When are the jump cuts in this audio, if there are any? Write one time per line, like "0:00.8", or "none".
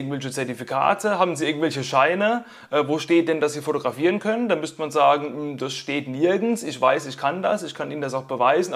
none